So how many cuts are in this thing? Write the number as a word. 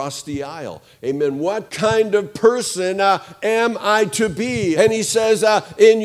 two